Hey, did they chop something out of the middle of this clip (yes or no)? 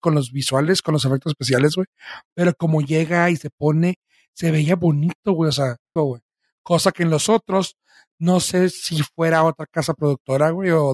yes